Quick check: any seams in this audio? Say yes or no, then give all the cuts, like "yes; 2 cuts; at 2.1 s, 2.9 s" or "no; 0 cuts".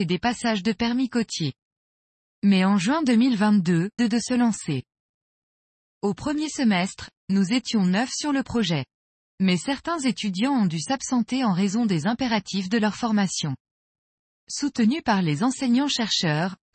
yes; 1 cut; at 4.0 s